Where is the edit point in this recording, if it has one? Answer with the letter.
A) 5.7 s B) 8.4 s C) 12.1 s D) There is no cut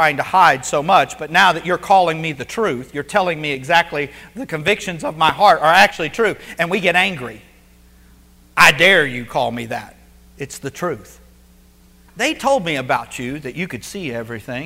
C